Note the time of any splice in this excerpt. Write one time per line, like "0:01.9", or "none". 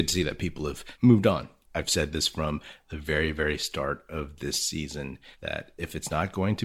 0:01.7